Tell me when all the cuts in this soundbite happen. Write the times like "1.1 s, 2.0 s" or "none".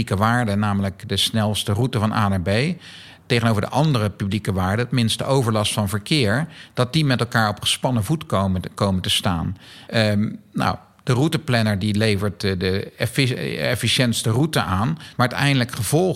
9.9 s, 15.2 s

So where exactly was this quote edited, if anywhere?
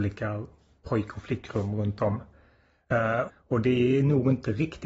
3.3 s

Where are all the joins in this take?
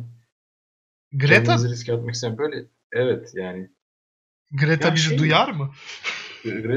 none

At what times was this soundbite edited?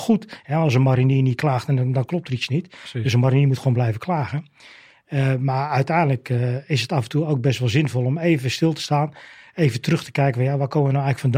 none

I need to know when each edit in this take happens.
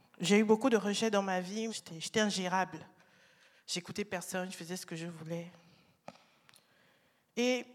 1.7 s

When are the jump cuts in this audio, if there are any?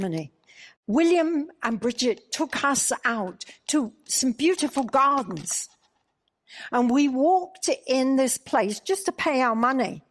none

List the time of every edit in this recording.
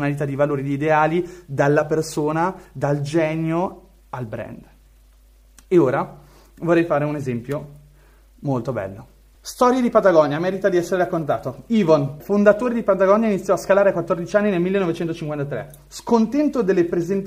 9.3 s, 12.2 s

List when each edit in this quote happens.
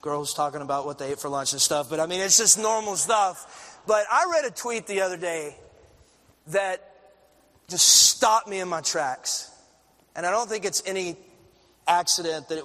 none

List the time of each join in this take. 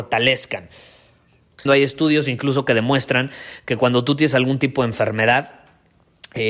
1.7 s

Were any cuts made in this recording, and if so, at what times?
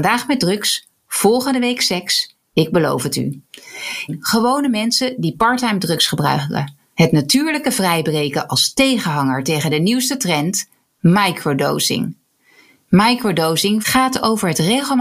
4.1 s, 6.9 s, 13.8 s

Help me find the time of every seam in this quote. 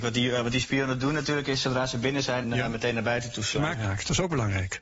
2.4 s, 3.7 s

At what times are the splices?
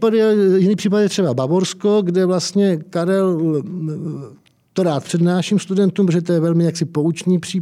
none

